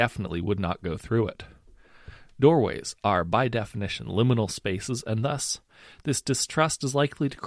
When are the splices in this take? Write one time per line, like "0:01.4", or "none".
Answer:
none